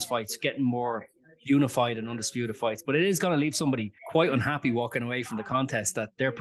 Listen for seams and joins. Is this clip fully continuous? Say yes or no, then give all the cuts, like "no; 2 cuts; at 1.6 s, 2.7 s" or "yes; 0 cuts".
no; 1 cut; at 4.0 s